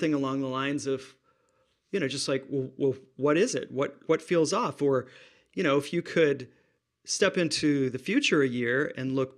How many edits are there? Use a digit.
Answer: 1